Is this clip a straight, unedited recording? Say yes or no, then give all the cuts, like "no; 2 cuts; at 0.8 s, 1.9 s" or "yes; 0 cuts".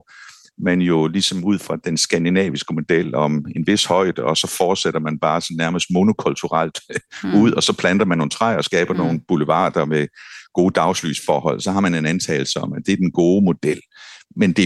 yes; 0 cuts